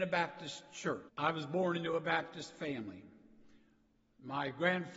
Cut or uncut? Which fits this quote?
cut